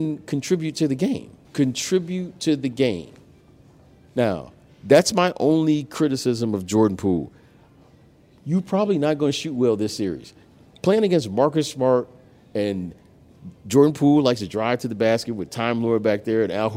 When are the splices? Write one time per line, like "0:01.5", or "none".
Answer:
0:01.5